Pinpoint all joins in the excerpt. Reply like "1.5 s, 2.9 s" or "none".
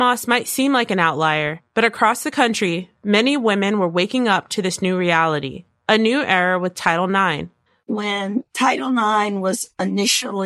7.8 s

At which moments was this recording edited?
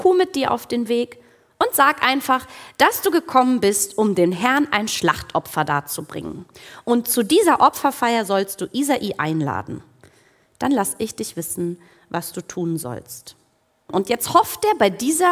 13.9 s

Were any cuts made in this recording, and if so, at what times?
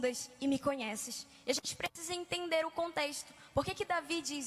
none

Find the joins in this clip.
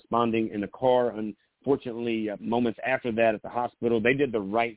2.4 s

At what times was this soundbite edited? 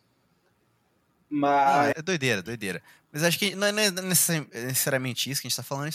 1.9 s

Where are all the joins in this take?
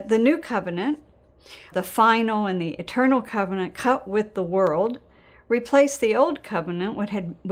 1.7 s

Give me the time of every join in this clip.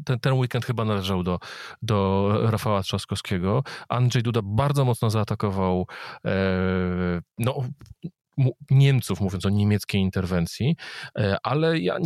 none

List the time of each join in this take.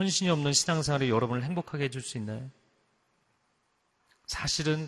none

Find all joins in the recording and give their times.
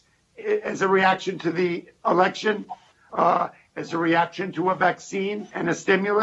none

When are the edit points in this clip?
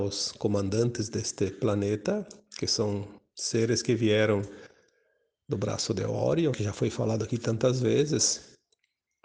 6.5 s

